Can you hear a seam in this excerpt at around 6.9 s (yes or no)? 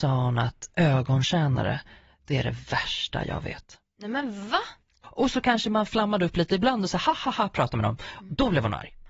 no